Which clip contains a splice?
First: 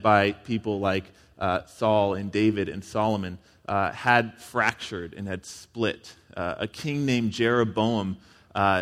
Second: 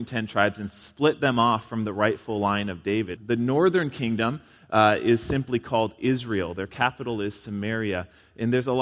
second; 1 cut; at 3.2 s

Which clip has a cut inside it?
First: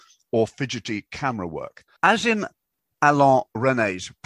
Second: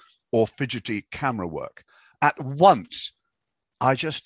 first; 1 cut; at 2.0 s

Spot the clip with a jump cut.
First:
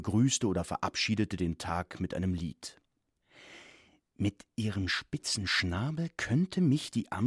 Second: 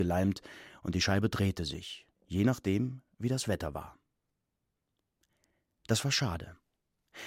second; 1 cut; at 2.1 s

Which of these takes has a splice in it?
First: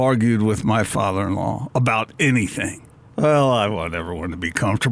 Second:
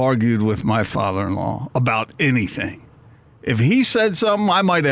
first; 1 cut; at 3.1 s

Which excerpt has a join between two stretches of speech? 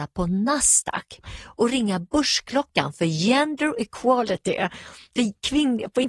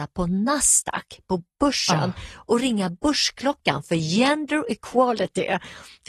first; 1 cut; at 1.2 s

